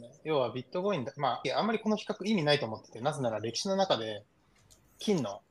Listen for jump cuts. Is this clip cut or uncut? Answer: cut